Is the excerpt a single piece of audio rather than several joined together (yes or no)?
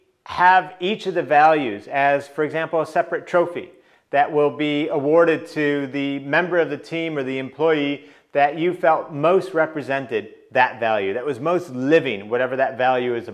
yes